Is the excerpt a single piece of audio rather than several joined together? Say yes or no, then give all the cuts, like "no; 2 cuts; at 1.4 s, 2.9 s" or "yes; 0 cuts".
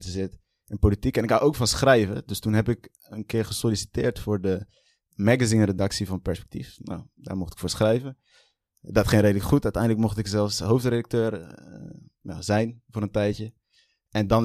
yes; 0 cuts